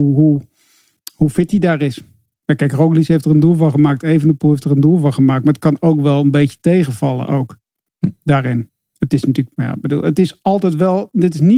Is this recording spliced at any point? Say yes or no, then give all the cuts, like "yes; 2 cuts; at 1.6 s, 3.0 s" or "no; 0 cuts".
no; 0 cuts